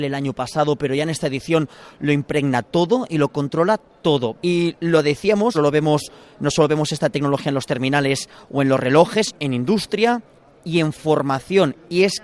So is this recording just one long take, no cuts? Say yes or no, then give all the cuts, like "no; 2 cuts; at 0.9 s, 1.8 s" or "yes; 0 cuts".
no; 3 cuts; at 4.3 s, 5.5 s, 9.3 s